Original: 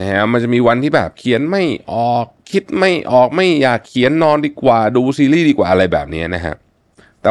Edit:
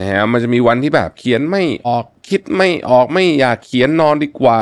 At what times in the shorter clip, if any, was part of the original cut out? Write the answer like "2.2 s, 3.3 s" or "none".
1.8 s